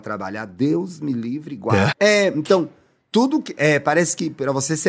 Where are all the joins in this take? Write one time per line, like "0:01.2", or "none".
0:01.9